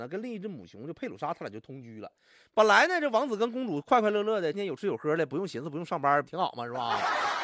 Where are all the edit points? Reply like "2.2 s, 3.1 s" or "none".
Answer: 4.5 s, 6.2 s